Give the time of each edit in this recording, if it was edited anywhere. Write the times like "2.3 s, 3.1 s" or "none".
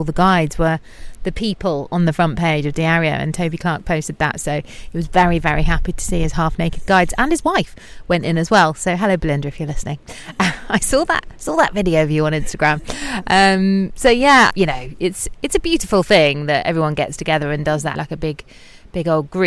14.5 s, 17.9 s